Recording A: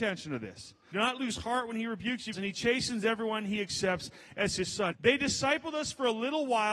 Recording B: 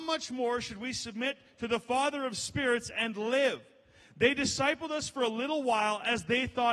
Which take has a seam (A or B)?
A